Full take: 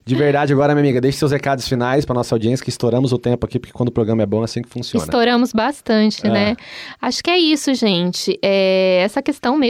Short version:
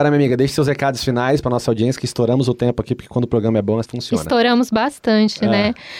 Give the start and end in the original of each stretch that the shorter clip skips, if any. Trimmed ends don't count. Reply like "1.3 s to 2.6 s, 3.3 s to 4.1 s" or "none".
4.5 s to 4.6 s